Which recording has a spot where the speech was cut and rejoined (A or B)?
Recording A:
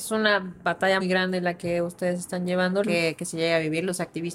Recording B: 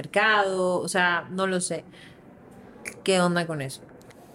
A